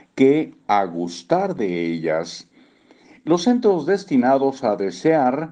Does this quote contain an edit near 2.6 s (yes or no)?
no